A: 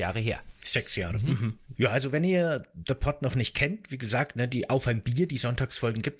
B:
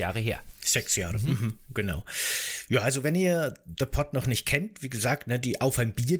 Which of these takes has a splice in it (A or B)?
A